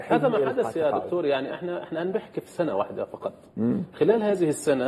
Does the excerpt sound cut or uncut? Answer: uncut